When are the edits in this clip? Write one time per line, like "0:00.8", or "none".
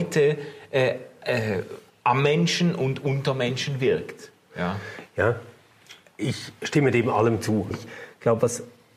0:07.7